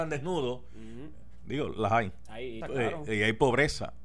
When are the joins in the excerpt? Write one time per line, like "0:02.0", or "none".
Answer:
0:02.6